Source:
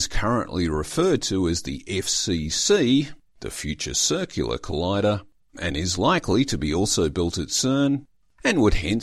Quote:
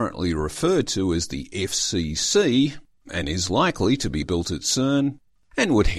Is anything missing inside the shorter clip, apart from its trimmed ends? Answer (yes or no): yes